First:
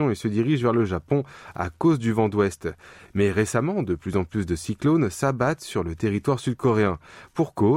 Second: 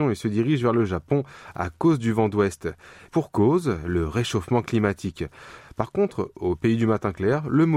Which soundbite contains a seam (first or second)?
second